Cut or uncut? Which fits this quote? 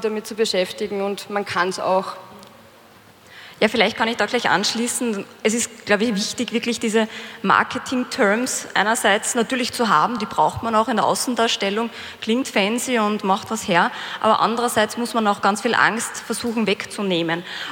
uncut